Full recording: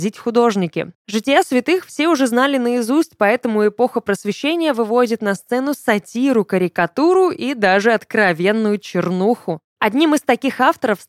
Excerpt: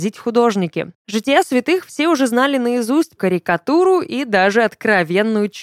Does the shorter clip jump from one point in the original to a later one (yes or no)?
yes